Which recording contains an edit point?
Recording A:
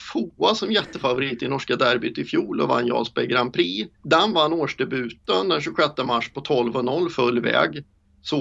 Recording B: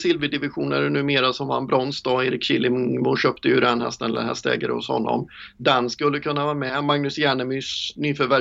A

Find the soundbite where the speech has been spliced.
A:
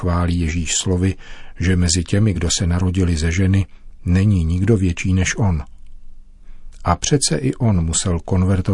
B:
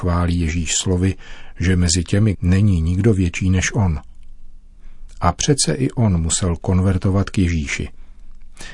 B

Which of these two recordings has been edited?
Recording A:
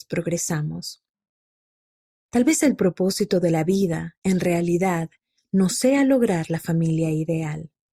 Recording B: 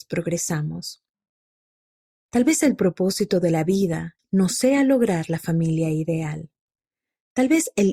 B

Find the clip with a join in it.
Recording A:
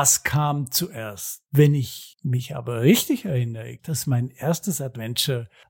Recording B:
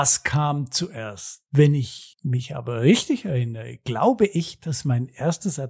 A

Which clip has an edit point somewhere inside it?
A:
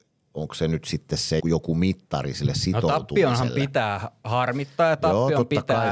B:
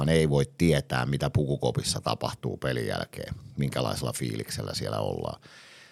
A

